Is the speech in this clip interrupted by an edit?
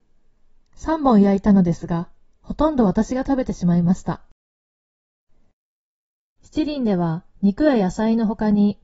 no; 0 cuts

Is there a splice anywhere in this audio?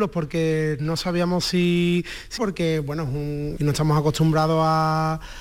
yes; 2 cuts; at 2.4 s, 3.6 s

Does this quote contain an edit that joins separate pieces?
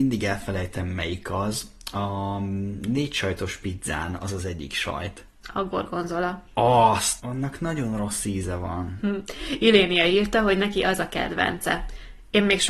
yes; 1 cut; at 7.2 s

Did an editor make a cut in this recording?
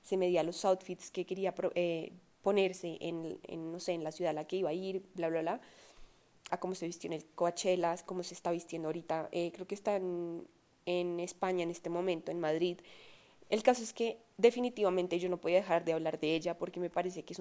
yes; 2 cuts; at 6.5 s, 13.4 s

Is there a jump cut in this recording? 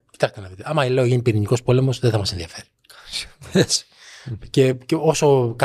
no; 0 cuts

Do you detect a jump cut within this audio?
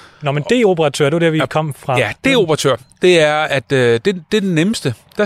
no; 0 cuts

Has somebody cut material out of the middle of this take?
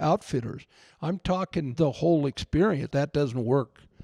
yes; 1 cut; at 2.9 s

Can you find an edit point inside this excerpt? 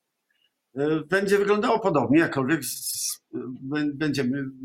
yes; 1 cut; at 2.9 s

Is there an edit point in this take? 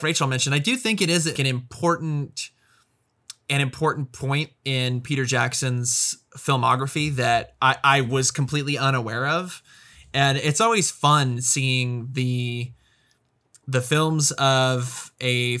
yes; 1 cut; at 1.4 s

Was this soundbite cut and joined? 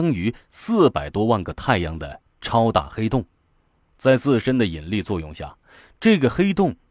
no; 0 cuts

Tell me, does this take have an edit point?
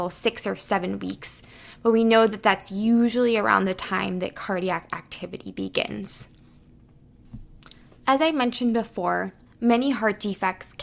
yes; 1 cut; at 9.5 s

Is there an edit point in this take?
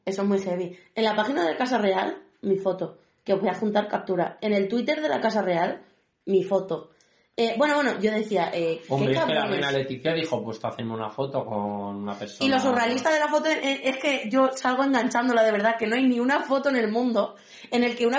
no; 0 cuts

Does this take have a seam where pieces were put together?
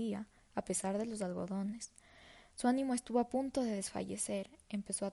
no; 0 cuts

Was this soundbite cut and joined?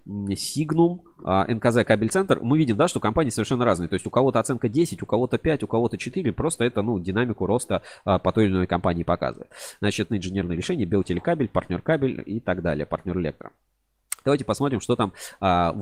yes; 1 cut; at 10.1 s

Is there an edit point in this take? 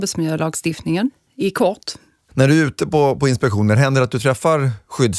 no; 0 cuts

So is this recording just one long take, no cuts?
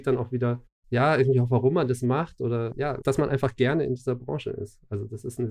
yes; 0 cuts

